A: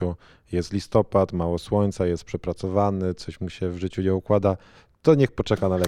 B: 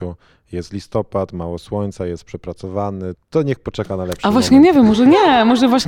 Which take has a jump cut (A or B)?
B